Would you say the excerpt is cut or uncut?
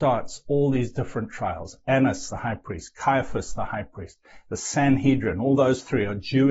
uncut